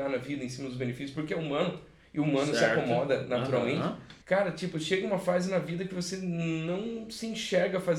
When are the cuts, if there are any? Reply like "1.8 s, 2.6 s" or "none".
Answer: 4.2 s